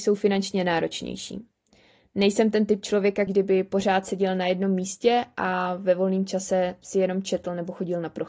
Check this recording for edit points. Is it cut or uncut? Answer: cut